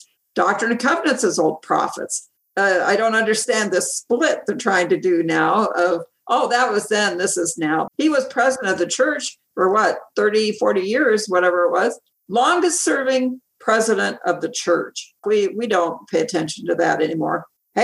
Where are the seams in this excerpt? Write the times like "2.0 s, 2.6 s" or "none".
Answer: 7.9 s, 15.2 s